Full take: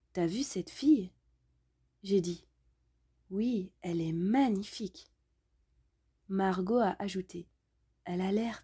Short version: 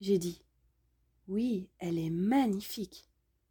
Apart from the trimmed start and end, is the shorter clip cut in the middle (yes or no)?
no